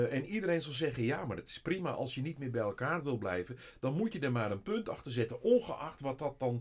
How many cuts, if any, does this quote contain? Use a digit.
0